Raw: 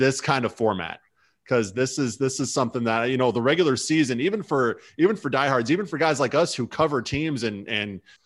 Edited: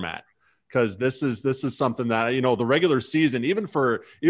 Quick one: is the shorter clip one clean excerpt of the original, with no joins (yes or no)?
yes